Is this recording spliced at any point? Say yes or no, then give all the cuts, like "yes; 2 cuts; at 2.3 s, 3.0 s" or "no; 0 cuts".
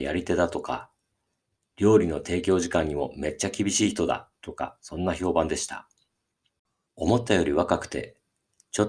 yes; 1 cut; at 6.9 s